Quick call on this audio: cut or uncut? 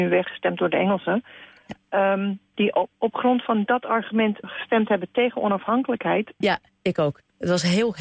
cut